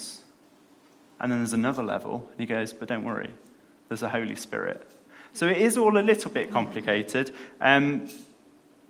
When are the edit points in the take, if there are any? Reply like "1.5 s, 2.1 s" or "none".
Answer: none